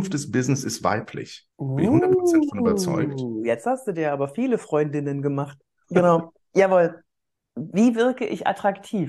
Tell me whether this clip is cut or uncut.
cut